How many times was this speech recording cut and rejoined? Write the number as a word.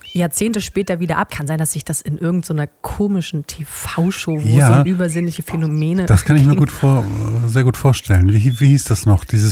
one